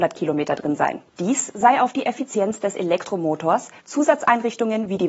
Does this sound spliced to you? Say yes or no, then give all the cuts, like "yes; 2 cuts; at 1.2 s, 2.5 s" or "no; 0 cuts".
yes; 2 cuts; at 1.1 s, 3.8 s